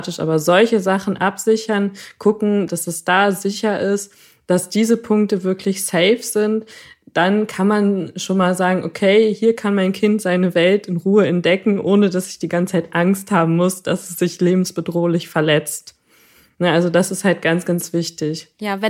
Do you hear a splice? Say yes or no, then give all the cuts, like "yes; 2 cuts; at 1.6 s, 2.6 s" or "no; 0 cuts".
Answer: yes; 1 cut; at 2.7 s